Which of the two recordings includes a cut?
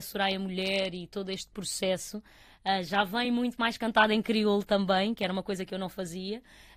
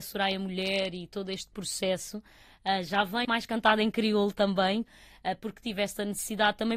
second; 2 cuts; at 3.2 s, 4.8 s

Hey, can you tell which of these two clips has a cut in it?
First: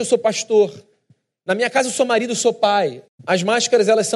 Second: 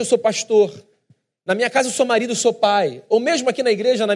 first; 1 cut; at 3.1 s

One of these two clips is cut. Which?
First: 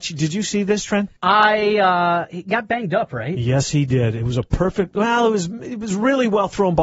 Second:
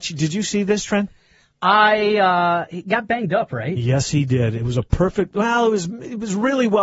first; 1 cut; at 1.2 s

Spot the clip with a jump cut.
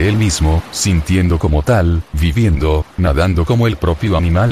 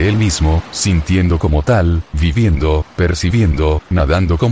first; 1 cut; at 2.9 s

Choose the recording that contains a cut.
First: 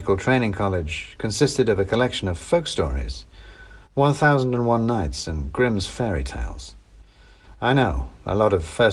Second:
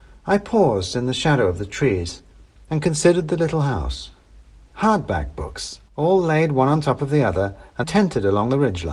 second; 3 cuts; at 4.7 s, 5.9 s, 7.8 s

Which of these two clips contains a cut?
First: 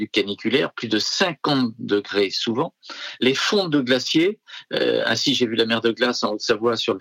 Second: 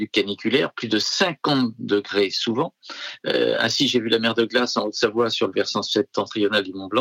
second; 1 cut; at 3.2 s

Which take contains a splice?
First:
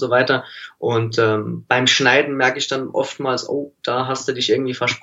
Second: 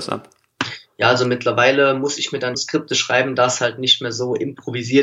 second; 1 cut; at 2.5 s

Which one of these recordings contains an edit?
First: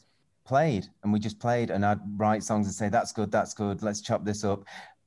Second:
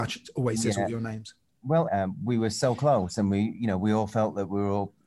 second; 1 cut; at 1.9 s

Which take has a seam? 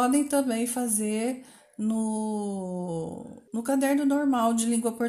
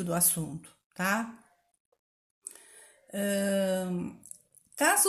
first; 1 cut; at 3.5 s

